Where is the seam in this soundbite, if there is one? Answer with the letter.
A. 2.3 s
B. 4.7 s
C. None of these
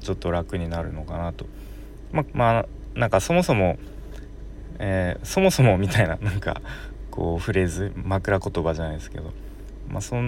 A